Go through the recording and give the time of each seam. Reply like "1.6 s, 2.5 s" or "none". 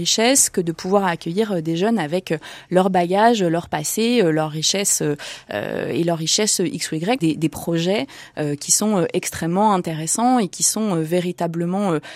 7.2 s

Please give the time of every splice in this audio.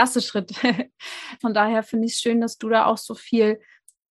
1.4 s

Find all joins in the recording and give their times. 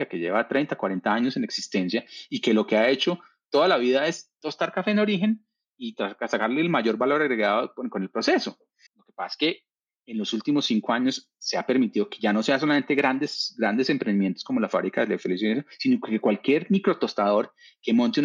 8.9 s

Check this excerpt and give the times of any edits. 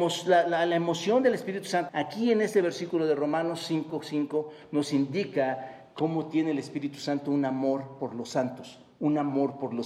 1.9 s

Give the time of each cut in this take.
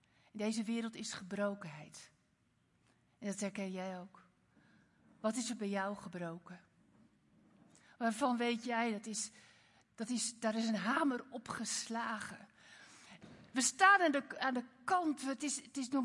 none

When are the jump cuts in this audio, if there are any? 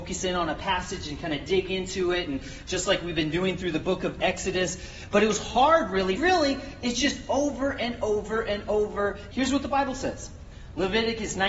6.2 s, 9.3 s

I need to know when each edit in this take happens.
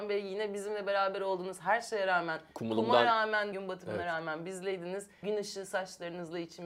3.5 s, 5.2 s

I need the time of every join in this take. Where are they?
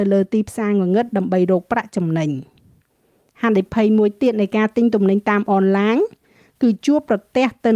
none

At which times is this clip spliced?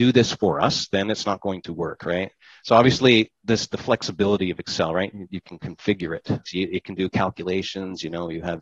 6.4 s

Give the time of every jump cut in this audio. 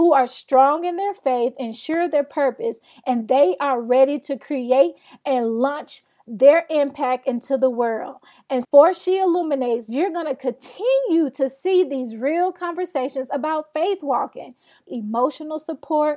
8.6 s, 14.9 s

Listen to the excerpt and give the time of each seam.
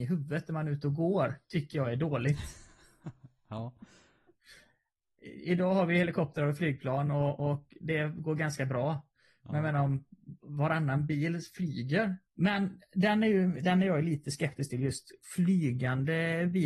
12.3 s

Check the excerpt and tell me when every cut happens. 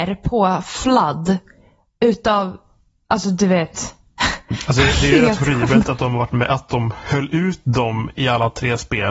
none

